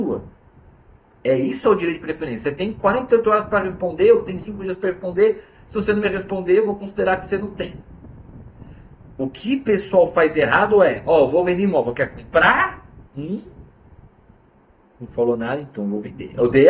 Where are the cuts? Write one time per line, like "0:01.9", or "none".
none